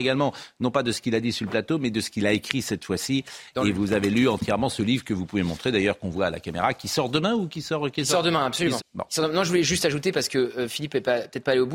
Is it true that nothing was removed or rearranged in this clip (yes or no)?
no